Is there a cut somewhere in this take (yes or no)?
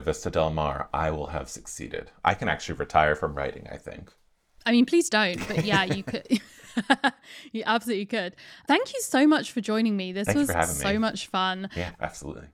no